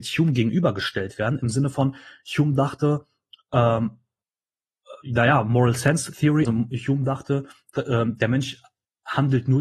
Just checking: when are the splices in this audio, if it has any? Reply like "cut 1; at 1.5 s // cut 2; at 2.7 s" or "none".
cut 1; at 6.4 s